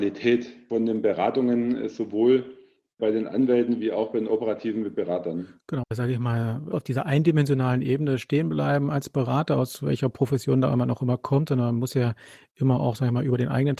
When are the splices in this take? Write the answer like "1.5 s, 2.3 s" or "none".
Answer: 5.8 s